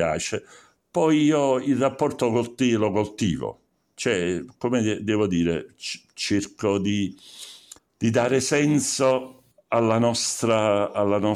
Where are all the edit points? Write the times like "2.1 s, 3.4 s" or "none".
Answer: 7.8 s